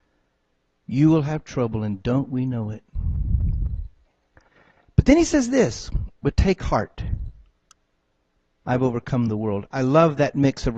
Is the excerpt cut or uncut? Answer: uncut